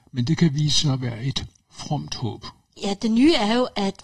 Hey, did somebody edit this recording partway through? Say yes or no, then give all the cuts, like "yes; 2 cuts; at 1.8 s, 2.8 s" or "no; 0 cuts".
yes; 1 cut; at 2.8 s